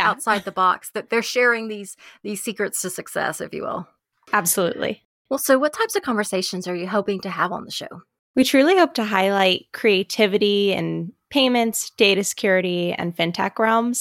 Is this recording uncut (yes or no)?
yes